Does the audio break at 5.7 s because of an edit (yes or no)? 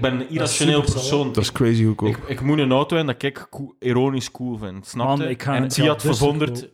yes